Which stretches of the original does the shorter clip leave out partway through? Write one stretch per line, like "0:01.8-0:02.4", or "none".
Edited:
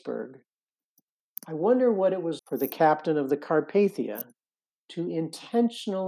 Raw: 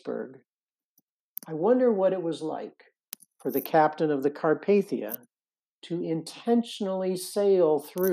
0:02.4-0:03.3